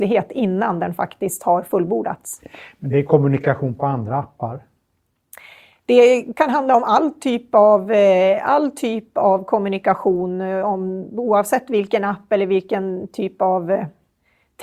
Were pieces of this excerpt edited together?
no; 0 cuts

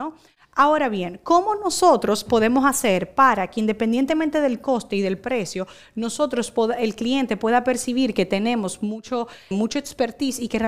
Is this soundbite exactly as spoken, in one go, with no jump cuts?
no; 1 cut; at 9.5 s

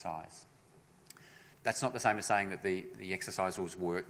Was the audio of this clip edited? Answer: yes; 2 cuts; at 1.5 s, 2.9 s

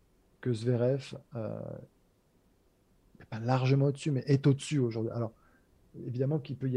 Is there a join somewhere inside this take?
no; 0 cuts

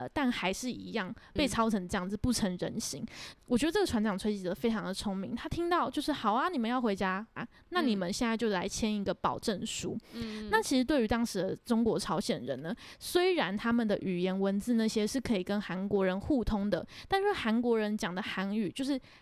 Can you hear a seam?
yes; 2 cuts; at 3.3 s, 7.4 s

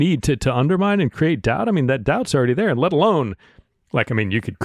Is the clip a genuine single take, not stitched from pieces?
yes; 0 cuts

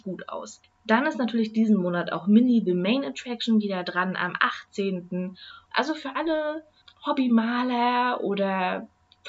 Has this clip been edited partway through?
yes; 1 cut; at 5.7 s

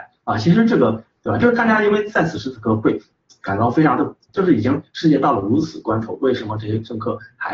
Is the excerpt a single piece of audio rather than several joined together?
no; 2 cuts; at 1.2 s, 4.3 s

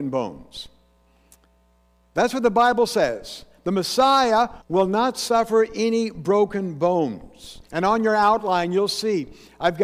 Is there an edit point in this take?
yes; 2 cuts; at 4.6 s, 7.7 s

